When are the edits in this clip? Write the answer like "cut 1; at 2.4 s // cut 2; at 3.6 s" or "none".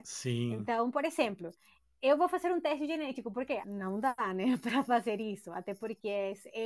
cut 1; at 3.6 s